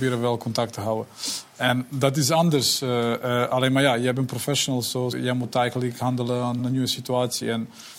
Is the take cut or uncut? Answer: cut